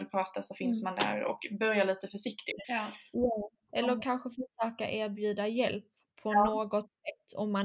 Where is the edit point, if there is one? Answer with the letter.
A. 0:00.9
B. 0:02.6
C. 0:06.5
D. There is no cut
B